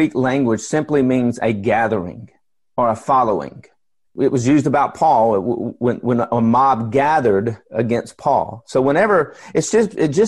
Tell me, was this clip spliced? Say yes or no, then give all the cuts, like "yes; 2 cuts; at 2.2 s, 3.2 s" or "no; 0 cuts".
yes; 1 cut; at 4.0 s